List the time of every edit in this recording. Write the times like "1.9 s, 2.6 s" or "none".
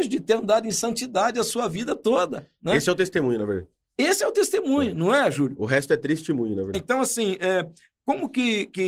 6.7 s